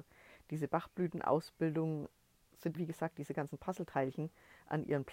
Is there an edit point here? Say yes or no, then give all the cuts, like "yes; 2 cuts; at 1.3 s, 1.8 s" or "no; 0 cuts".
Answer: yes; 1 cut; at 2.7 s